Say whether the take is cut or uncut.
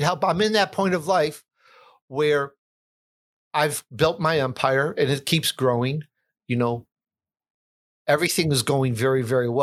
uncut